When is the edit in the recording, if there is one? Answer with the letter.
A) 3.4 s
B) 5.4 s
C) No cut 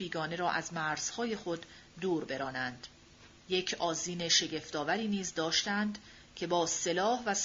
A